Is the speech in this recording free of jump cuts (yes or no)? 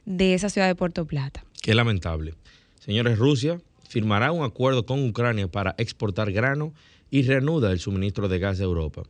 yes